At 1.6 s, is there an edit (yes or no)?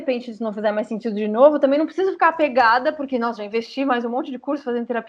no